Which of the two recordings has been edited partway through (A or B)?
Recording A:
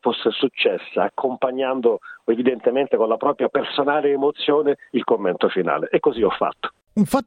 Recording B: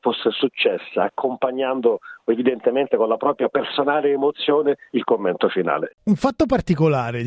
B